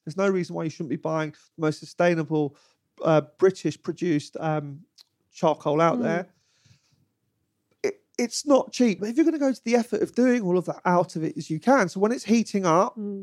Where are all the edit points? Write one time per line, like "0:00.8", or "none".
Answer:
0:09.0
0:10.8